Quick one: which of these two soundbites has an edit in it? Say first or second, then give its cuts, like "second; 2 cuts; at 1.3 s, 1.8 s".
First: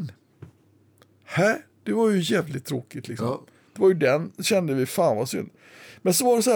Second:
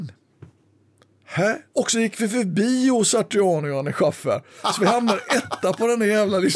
second; 1 cut; at 1.7 s